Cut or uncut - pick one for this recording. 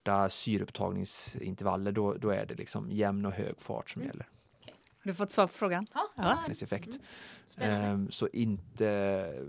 cut